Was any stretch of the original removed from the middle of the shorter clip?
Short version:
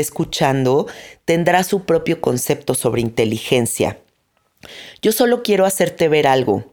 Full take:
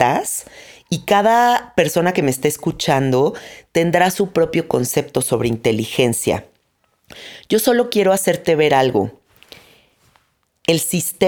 no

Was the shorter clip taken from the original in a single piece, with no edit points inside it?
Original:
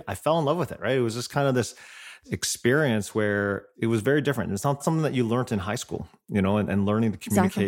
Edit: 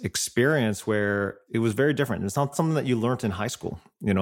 yes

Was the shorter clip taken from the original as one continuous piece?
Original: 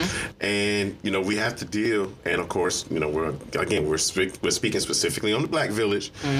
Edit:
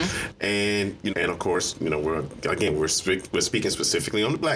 no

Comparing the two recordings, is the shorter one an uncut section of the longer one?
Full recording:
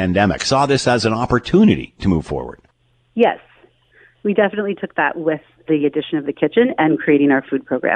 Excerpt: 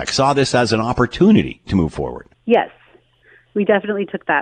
no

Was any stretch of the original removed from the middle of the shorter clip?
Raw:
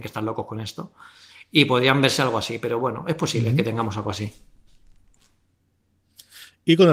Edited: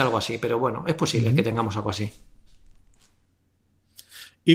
no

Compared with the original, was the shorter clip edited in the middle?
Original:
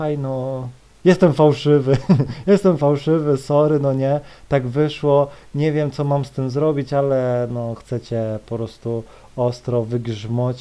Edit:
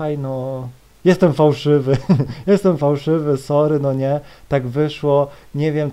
no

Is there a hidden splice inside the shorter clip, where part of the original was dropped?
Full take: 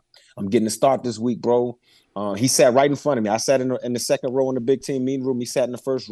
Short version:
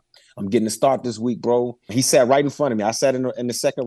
yes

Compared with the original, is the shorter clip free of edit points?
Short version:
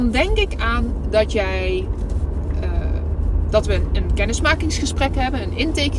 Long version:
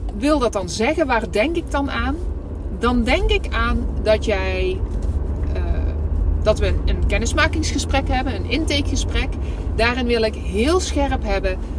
yes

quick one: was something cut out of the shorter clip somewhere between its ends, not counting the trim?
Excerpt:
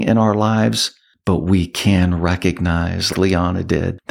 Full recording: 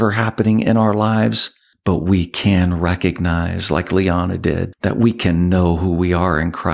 yes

